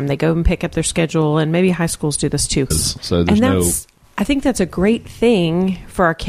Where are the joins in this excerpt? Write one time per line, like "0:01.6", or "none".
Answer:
0:02.7